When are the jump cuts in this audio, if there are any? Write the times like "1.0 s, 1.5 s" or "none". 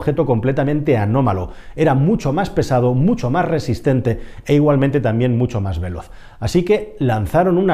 none

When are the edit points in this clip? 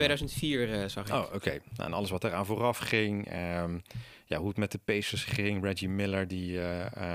none

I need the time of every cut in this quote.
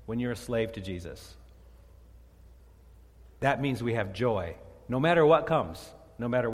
none

